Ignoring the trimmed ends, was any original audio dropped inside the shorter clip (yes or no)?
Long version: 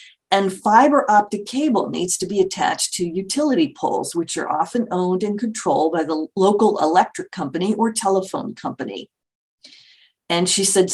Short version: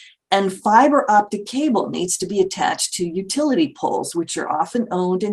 no